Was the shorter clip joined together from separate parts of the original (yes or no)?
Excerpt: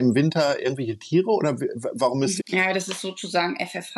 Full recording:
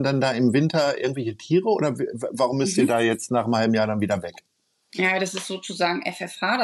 yes